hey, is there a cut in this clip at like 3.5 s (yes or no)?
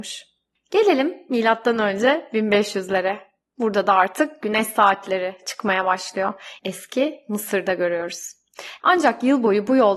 no